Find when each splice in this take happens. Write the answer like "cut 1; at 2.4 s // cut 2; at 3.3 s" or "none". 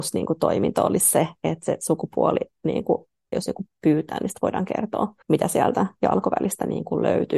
cut 1; at 3.3 s // cut 2; at 5.2 s